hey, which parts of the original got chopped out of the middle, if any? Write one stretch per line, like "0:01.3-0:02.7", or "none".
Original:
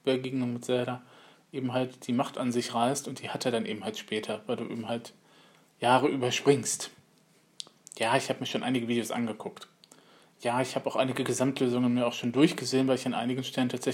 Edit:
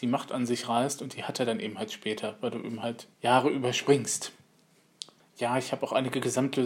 0:05.2-0:05.7
0:07.8-0:10.2